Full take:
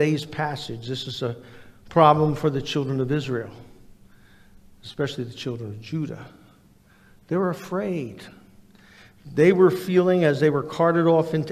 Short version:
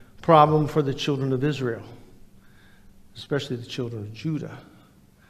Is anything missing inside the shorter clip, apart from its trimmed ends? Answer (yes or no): no